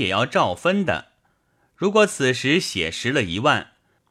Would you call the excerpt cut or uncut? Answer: uncut